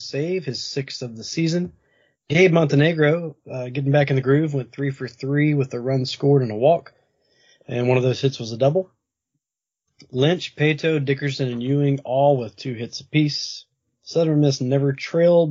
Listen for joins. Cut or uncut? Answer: uncut